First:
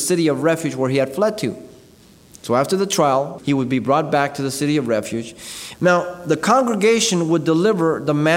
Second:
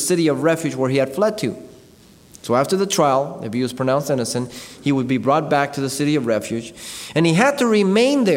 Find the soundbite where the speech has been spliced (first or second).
first